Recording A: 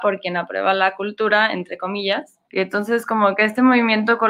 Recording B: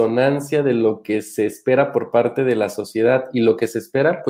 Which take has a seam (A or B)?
A